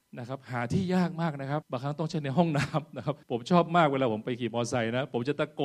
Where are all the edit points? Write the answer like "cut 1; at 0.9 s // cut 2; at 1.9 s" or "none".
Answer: cut 1; at 1.6 s // cut 2; at 3.2 s